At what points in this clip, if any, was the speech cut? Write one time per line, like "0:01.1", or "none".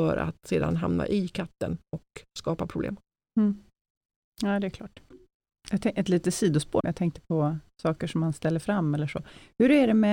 0:06.8